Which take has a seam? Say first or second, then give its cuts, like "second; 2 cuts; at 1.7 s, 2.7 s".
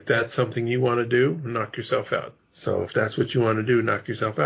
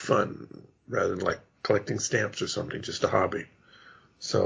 first; 1 cut; at 2.4 s